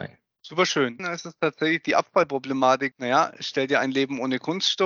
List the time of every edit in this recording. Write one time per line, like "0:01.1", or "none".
0:01.0
0:02.9